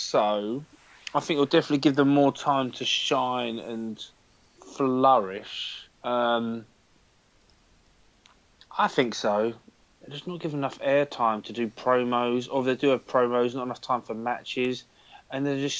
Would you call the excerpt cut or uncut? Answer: cut